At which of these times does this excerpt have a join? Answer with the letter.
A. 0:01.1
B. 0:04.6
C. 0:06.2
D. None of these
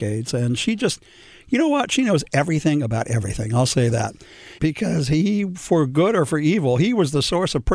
B